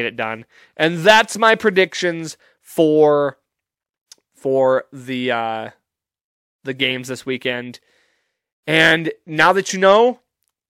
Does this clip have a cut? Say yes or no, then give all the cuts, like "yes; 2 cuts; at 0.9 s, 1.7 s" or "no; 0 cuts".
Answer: no; 0 cuts